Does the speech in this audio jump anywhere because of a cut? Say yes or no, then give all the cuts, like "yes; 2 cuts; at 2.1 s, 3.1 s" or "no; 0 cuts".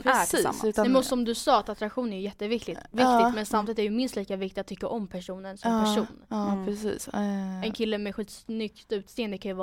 no; 0 cuts